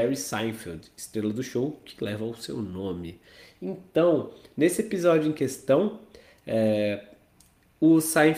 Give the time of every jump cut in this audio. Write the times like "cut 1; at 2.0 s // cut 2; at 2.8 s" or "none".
none